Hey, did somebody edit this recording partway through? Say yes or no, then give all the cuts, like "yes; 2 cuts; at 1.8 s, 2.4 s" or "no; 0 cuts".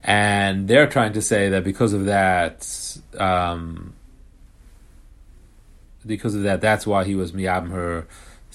no; 0 cuts